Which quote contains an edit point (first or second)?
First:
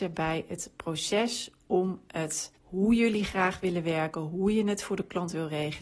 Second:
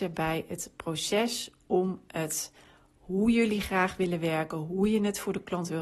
first